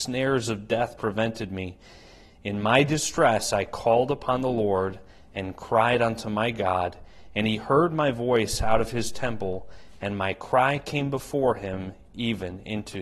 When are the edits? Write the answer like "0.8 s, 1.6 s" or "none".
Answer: none